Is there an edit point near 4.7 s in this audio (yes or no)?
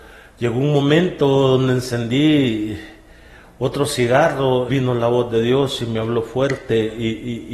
yes